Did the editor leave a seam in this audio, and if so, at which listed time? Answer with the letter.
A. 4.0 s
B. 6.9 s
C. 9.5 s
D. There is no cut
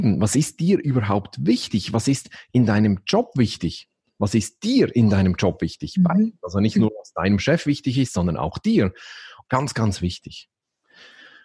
C